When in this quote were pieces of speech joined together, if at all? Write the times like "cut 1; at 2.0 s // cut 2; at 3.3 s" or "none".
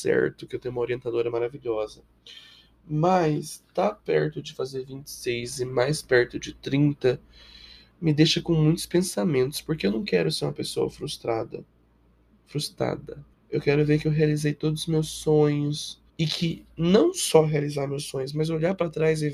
cut 1; at 13.3 s // cut 2; at 16.1 s